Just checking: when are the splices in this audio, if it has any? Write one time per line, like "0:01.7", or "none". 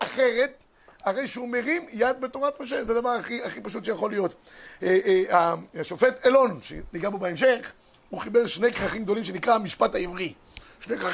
none